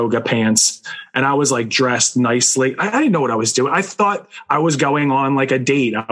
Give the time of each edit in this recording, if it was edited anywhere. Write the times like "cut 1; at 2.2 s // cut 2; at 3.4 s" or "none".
none